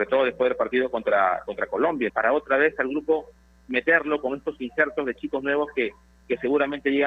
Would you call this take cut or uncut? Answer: cut